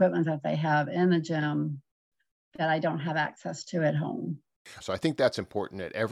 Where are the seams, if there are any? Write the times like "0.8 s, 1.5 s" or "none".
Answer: 4.8 s